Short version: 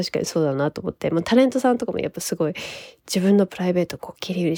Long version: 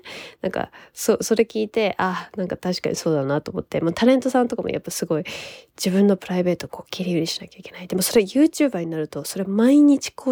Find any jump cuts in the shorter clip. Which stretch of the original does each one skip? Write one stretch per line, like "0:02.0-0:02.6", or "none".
none

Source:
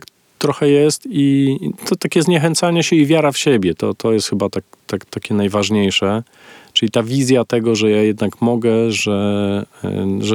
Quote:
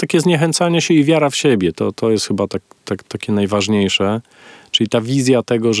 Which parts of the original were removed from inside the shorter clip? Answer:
none

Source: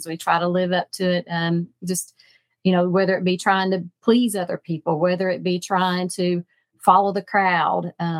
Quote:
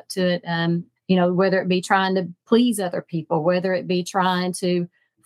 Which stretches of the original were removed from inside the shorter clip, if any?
0:01.8-0:02.5

